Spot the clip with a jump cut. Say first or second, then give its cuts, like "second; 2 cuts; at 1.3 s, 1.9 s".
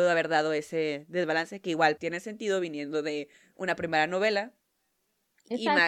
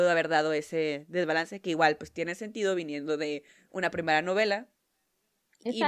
first; 1 cut; at 2.0 s